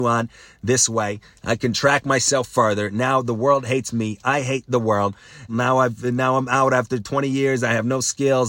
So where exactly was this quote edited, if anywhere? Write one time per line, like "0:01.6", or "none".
0:05.5